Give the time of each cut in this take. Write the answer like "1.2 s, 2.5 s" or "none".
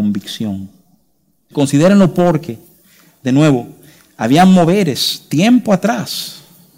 1.5 s